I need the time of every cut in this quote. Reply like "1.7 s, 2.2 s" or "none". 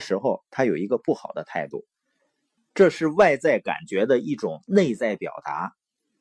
2.6 s